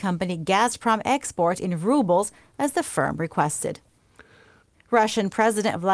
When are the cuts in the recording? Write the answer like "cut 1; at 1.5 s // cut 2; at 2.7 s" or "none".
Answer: cut 1; at 4.7 s